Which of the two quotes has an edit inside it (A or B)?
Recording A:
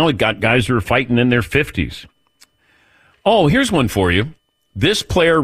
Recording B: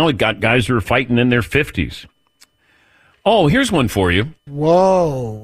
B